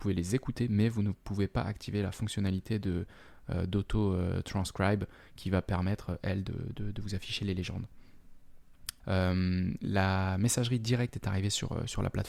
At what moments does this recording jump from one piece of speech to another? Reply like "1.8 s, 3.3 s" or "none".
9.0 s